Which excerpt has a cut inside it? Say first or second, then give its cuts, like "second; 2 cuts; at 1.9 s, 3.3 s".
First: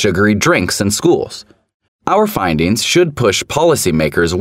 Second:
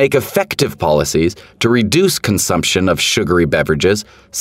first; 1 cut; at 1.9 s